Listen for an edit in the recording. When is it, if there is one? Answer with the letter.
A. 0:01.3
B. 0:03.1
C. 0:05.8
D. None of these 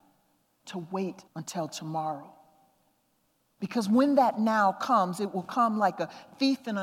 A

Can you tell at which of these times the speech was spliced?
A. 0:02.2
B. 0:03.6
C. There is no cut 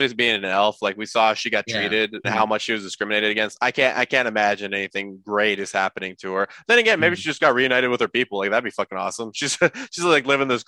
A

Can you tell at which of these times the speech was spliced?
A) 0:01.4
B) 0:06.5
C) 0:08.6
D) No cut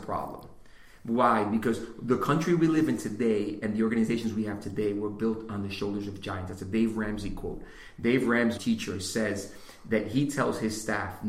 C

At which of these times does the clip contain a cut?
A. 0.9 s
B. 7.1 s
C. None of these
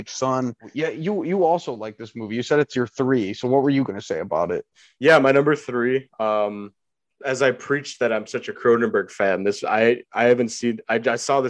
C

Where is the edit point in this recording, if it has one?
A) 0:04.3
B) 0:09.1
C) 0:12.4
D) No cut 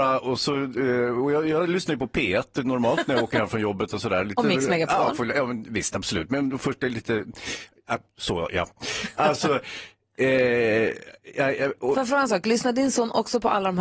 B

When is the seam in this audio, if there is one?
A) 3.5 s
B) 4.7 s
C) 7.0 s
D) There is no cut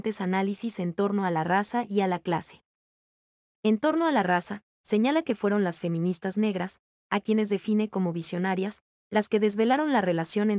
D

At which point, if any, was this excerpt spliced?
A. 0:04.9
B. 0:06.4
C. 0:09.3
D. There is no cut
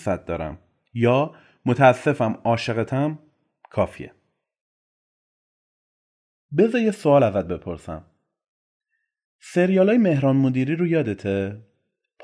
D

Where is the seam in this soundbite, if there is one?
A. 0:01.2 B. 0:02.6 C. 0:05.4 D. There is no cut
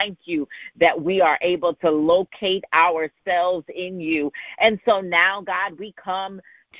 D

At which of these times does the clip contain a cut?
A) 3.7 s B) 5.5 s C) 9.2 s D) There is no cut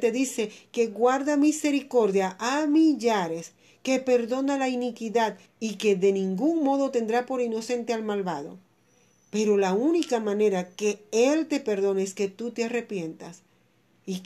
B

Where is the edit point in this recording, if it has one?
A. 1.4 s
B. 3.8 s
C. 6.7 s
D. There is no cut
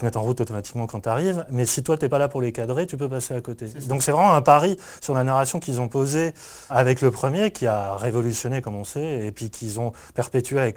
C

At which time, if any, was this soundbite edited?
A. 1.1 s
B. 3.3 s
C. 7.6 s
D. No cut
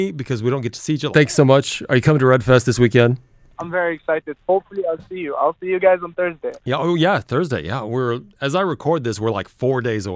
A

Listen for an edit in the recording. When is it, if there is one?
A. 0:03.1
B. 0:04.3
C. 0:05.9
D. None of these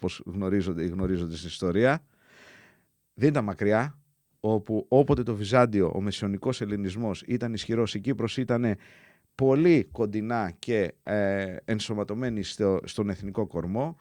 B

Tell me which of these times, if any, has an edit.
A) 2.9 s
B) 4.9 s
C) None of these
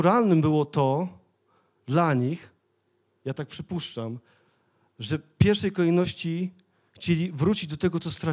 C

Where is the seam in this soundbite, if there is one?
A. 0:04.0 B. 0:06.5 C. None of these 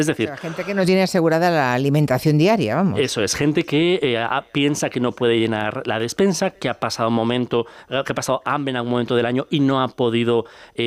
C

